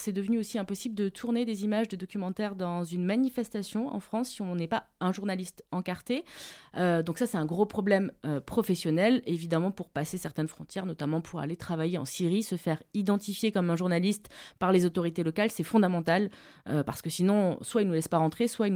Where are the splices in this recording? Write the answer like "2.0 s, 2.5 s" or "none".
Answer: none